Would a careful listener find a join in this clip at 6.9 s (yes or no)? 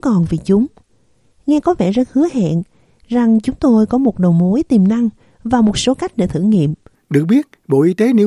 yes